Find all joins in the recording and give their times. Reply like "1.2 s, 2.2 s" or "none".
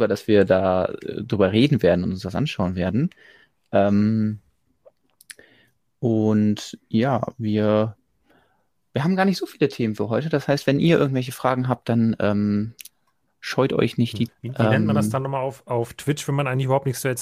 14.3 s